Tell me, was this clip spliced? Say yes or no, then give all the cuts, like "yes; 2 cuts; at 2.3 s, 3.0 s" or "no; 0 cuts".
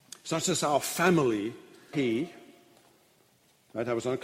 yes; 1 cut; at 1.9 s